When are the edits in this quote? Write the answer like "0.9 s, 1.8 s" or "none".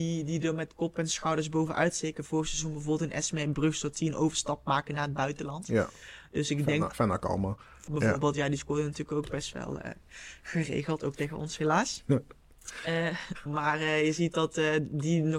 7.9 s